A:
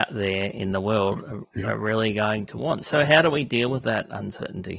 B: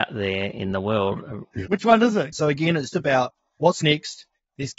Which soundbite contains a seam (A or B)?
B